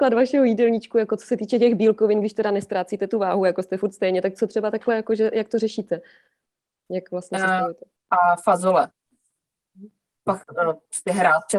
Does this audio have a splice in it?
yes; 1 cut; at 8.0 s

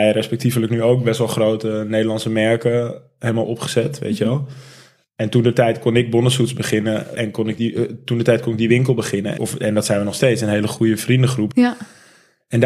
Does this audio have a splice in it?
yes; 3 cuts; at 7.1 s, 9.4 s, 11.5 s

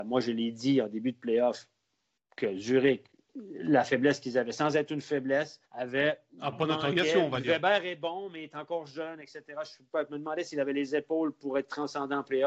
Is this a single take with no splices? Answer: no; 1 cut; at 5.7 s

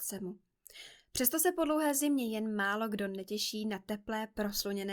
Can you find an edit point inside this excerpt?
no; 0 cuts

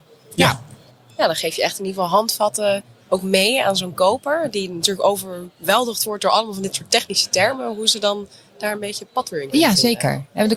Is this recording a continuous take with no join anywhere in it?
yes; 0 cuts

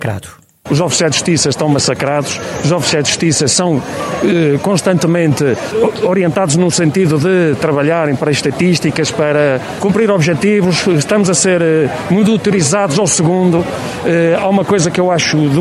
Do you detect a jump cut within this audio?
no; 0 cuts

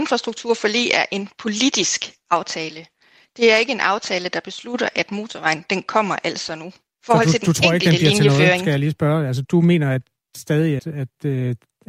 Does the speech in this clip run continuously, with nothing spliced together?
no; 3 cuts; at 6.9 s, 9.4 s, 10.8 s

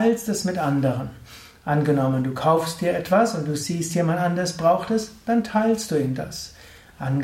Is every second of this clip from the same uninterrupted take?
yes; 0 cuts

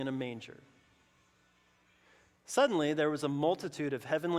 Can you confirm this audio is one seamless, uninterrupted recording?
yes; 0 cuts

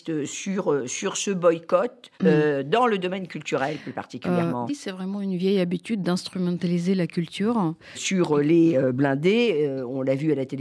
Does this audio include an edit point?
yes; 3 cuts; at 2.1 s, 4.7 s, 7.9 s

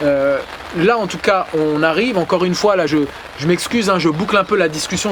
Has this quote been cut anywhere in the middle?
no; 0 cuts

